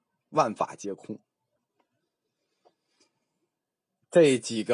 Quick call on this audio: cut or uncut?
uncut